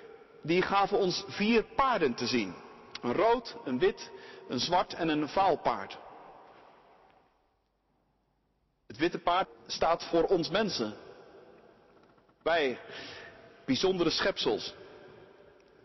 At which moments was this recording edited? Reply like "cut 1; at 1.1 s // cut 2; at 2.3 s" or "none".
cut 1; at 9.4 s